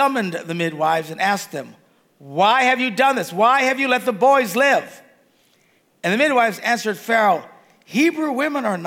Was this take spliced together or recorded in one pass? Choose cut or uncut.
uncut